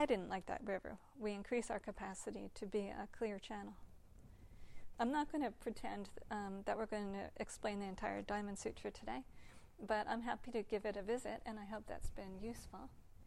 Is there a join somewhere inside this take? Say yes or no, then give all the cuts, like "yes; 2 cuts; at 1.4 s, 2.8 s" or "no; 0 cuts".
yes; 1 cut; at 4.9 s